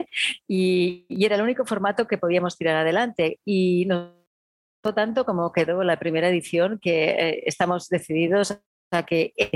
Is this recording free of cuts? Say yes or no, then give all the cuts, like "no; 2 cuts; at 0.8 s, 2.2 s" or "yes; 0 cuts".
yes; 0 cuts